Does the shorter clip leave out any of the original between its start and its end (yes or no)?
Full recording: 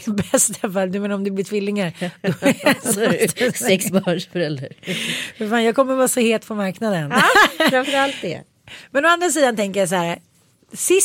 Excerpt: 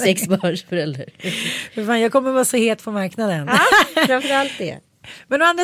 no